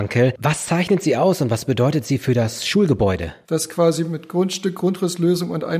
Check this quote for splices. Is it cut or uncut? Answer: cut